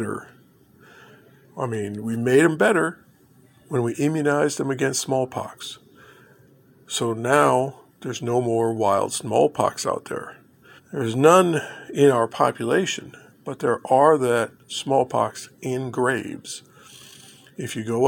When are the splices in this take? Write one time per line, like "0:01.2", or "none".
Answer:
0:10.8